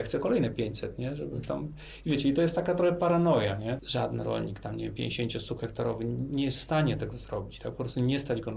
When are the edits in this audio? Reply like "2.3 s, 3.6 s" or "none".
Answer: 3.8 s